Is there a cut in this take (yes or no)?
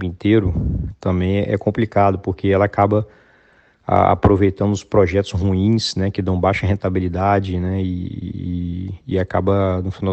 no